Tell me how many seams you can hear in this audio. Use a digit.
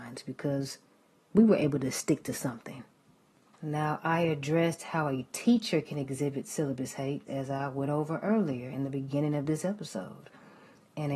1